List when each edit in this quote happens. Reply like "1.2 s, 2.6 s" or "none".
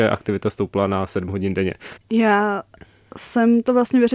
2.0 s